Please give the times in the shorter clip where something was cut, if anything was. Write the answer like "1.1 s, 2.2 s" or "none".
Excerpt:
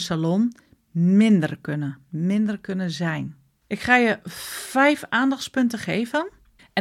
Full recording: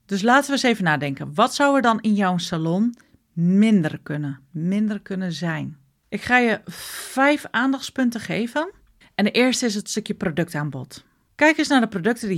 none